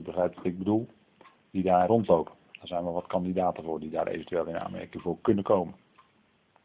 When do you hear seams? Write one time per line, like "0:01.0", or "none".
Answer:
0:01.9